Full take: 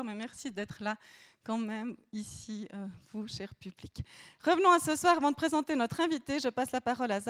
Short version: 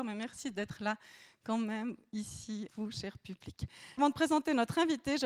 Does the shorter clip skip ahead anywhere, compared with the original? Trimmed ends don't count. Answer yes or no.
yes